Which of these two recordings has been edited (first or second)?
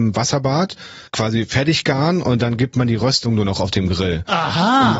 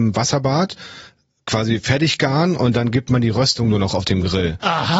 first